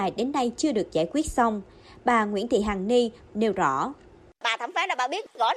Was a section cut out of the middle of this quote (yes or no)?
yes